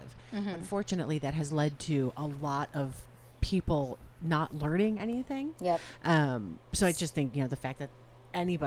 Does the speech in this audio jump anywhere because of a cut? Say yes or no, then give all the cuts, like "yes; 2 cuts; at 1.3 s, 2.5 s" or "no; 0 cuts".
no; 0 cuts